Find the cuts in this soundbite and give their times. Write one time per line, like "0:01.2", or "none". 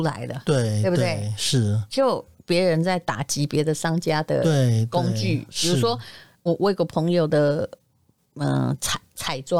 0:02.4